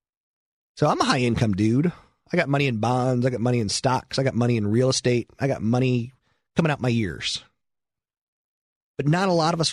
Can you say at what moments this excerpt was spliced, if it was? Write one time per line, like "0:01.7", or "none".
none